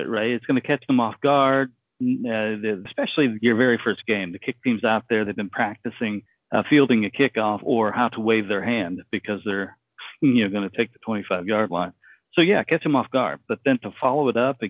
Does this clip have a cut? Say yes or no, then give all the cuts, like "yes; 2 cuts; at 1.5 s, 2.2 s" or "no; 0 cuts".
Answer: yes; 1 cut; at 2.9 s